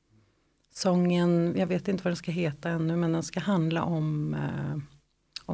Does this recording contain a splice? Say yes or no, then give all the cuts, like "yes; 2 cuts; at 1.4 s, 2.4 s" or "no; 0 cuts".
no; 0 cuts